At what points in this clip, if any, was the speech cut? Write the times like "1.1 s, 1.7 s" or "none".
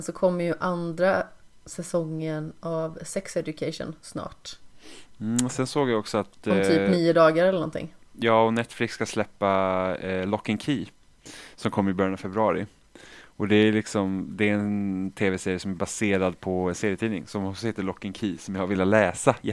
none